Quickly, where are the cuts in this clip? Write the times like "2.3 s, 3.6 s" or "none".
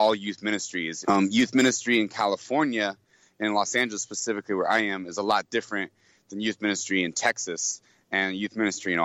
1.0 s